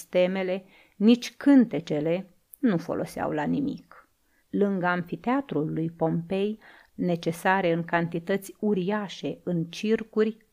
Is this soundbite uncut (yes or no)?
no